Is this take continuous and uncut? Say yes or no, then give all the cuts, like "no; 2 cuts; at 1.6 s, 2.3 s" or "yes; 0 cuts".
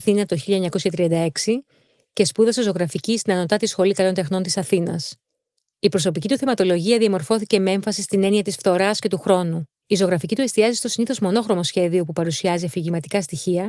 yes; 0 cuts